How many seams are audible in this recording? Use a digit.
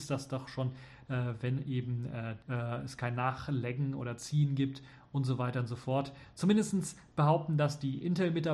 2